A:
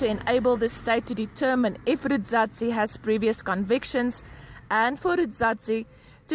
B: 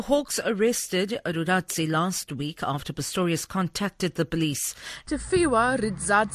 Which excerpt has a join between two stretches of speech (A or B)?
B